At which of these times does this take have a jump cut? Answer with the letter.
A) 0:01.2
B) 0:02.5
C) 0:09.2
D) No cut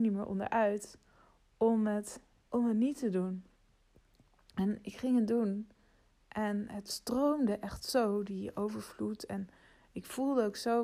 B